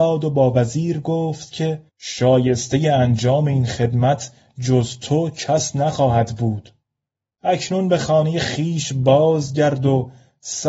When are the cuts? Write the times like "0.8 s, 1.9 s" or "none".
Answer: 1.9 s